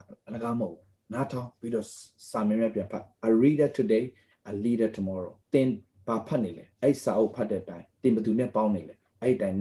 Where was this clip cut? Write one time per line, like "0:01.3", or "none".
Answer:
0:05.4
0:06.7
0:07.9